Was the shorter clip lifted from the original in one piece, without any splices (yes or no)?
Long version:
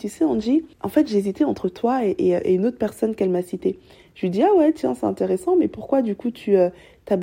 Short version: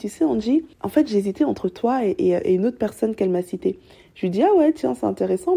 yes